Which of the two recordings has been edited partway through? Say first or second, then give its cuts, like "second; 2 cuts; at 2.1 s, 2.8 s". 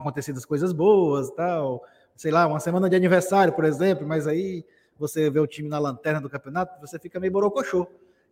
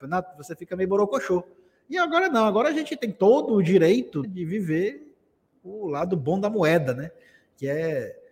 second; 1 cut; at 4.2 s